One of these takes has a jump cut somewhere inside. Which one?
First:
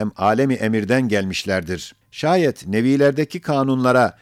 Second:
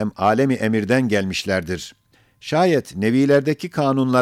first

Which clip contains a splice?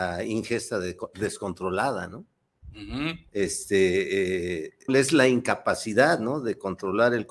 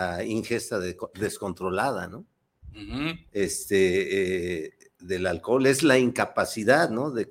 first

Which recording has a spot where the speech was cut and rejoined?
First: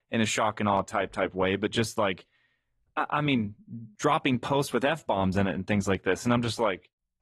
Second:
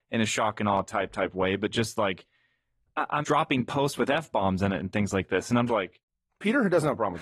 second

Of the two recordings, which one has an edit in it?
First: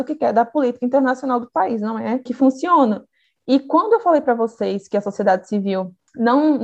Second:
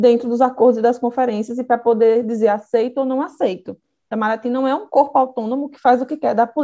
first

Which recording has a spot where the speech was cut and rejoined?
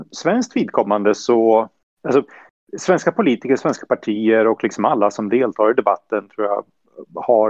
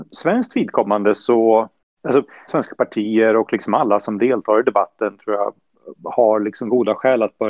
second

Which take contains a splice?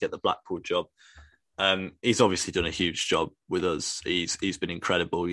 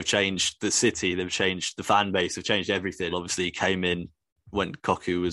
second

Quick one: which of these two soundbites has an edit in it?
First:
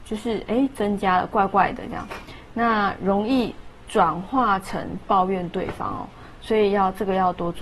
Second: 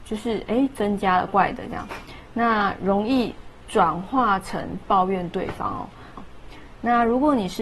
second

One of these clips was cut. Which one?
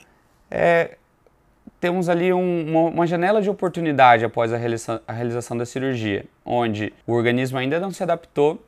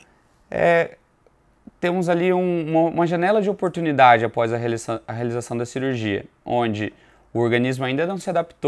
first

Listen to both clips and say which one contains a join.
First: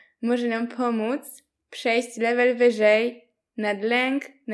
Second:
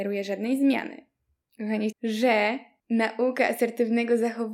second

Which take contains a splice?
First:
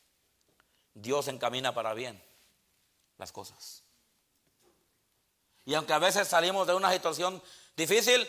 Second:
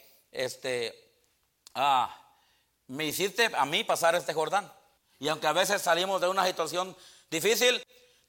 second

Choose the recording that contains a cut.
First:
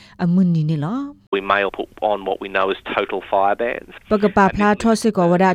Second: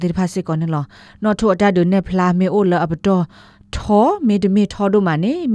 first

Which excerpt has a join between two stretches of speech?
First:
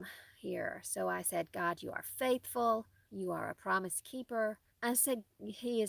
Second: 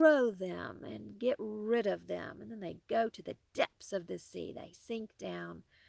first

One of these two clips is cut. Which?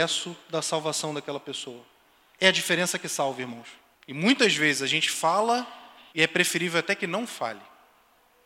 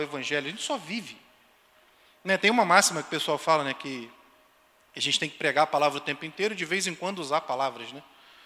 first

